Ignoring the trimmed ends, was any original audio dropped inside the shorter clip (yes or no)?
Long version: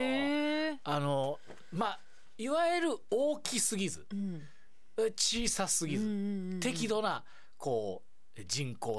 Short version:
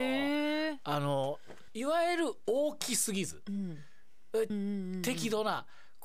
yes